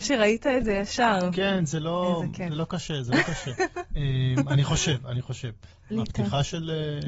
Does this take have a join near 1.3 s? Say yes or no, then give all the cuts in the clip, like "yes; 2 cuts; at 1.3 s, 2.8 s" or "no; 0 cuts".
no; 1 cut; at 5.9 s